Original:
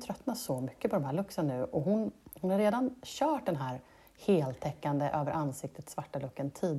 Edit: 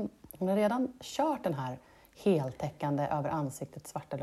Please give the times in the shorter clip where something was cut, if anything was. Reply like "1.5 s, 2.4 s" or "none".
none